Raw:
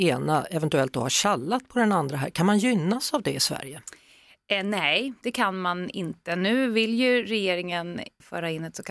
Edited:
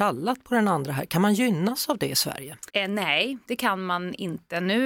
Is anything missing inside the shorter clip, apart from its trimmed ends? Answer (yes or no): yes